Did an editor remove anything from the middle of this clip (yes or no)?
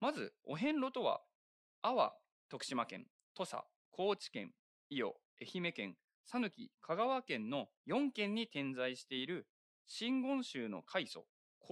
yes